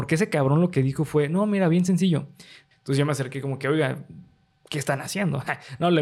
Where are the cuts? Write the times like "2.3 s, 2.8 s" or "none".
2.7 s